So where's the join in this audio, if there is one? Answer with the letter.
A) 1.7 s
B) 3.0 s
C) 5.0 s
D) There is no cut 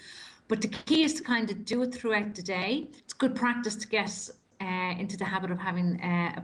B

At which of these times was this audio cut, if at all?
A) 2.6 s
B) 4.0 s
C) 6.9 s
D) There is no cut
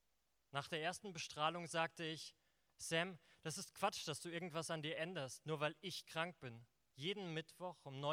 C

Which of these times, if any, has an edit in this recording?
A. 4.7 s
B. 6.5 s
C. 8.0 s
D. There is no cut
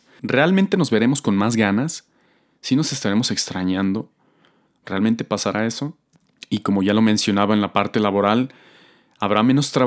A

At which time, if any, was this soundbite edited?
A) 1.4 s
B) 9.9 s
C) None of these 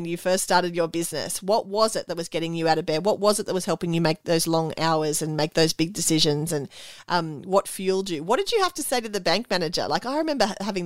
C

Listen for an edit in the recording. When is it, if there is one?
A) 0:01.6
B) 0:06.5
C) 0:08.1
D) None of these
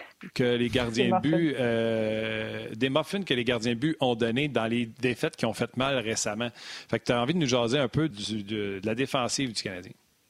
C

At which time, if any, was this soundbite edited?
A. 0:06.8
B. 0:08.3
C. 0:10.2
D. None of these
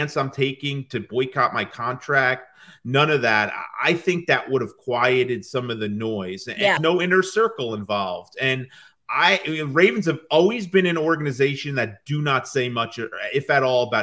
A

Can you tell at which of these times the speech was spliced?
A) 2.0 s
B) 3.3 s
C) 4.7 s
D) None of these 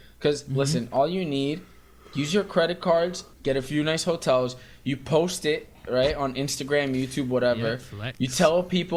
B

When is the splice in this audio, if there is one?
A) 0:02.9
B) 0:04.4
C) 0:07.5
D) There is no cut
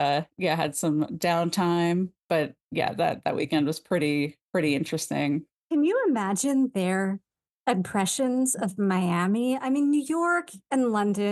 B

